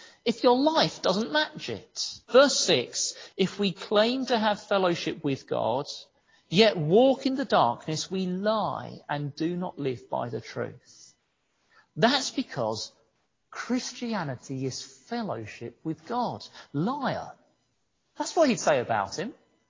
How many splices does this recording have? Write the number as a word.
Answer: two